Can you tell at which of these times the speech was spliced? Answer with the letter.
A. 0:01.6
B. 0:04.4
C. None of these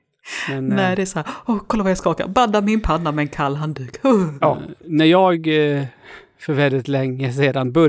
B